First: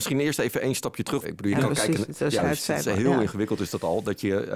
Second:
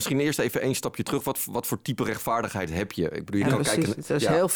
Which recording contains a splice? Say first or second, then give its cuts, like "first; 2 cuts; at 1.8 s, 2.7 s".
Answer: first; 2 cuts; at 1.2 s, 2.4 s